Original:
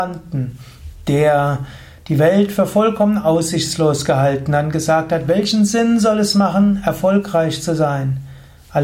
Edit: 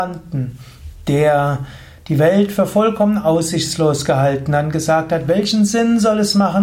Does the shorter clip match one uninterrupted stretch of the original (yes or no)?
yes